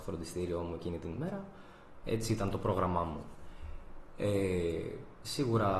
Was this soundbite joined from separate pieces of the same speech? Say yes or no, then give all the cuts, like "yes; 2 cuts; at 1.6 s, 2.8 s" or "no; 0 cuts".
yes; 1 cut; at 2.0 s